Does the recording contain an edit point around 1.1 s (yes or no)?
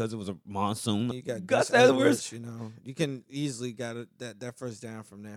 yes